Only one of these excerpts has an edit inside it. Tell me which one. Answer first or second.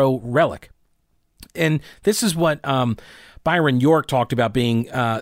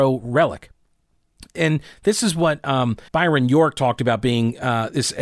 second